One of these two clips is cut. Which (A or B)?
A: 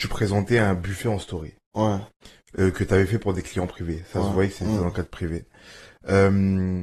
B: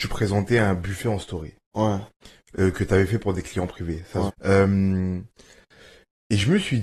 B